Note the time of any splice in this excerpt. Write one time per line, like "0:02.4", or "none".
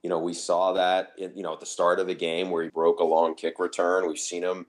0:02.7